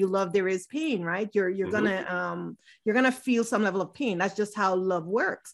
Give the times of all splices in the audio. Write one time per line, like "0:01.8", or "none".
none